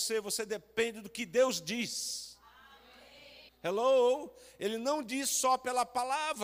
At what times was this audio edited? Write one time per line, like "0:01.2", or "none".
0:03.5